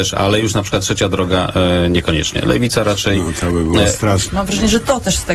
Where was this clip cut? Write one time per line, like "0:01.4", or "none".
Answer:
0:04.3

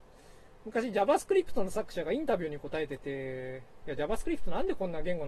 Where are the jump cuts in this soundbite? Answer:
0:03.8

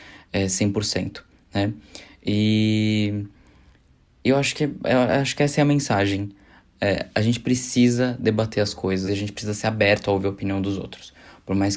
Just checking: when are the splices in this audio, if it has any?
0:09.1

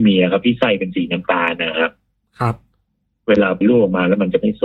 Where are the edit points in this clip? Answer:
0:03.6

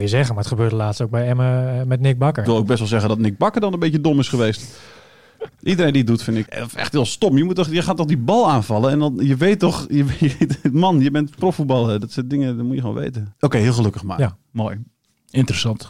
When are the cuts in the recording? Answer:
0:02.4
0:06.5
0:13.3

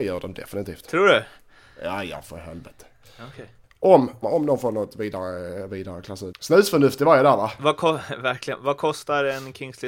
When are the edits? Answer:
0:04.2
0:06.3

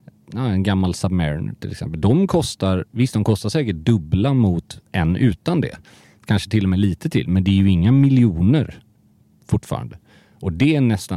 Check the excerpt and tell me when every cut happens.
none

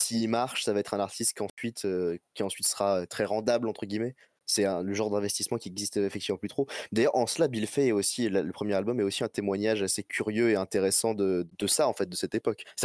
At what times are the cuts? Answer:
none

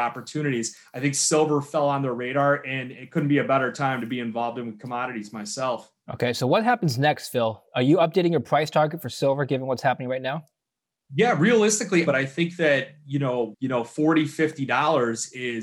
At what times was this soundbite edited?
0:12.1
0:13.5

